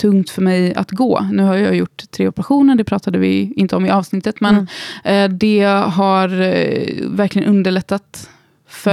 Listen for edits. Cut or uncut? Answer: uncut